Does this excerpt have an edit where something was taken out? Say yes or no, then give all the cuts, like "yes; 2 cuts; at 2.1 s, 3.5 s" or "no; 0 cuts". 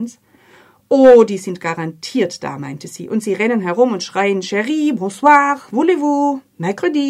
no; 0 cuts